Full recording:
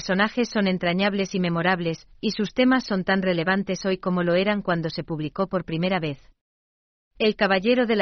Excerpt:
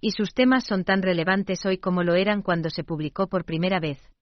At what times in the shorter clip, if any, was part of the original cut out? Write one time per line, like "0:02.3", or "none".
none